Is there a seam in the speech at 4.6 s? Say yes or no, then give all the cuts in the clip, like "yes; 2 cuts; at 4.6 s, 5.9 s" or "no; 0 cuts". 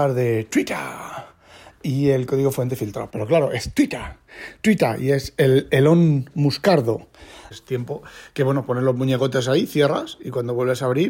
no; 2 cuts; at 3.1 s, 7.5 s